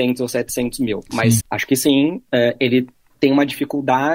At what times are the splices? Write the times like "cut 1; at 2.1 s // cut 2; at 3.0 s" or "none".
cut 1; at 1.4 s